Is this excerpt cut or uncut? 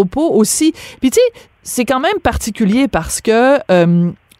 uncut